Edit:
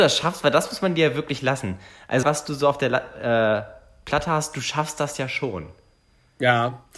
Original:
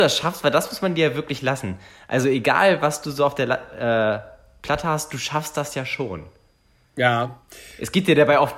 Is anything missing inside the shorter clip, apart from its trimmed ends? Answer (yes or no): yes